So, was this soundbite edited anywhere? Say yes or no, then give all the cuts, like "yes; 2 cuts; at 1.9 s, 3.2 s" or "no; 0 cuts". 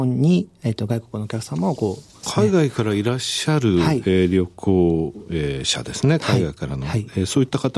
yes; 1 cut; at 2.2 s